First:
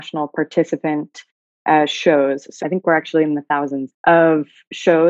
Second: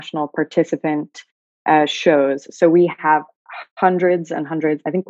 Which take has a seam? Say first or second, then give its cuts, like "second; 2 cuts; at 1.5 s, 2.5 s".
first; 2 cuts; at 2.6 s, 3.9 s